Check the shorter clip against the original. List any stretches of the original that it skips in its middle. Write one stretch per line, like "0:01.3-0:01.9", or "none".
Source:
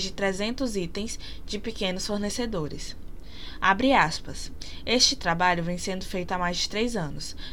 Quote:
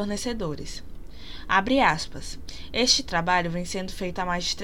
none